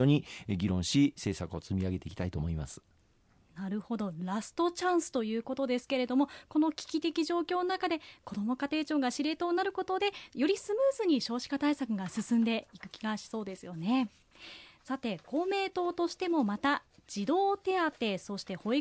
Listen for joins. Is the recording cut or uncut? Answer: uncut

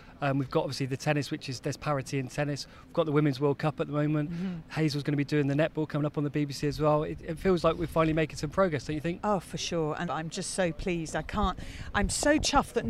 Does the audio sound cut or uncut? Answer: cut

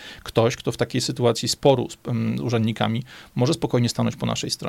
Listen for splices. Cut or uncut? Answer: uncut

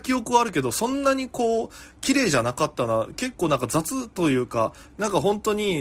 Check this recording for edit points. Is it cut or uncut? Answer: uncut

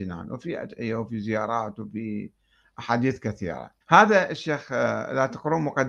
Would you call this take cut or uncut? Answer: cut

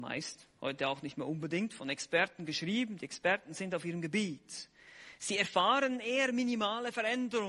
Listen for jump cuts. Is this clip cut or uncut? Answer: uncut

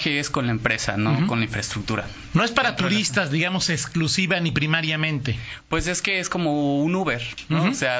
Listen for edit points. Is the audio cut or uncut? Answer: cut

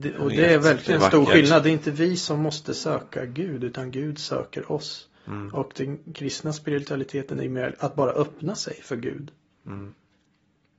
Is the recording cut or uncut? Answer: uncut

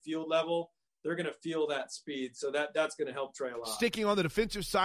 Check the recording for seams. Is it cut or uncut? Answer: uncut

